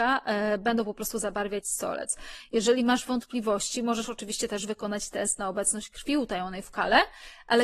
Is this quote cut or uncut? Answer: uncut